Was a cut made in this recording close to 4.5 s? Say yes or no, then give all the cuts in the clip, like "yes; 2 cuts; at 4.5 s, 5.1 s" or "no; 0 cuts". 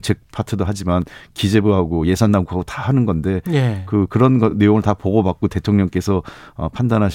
no; 0 cuts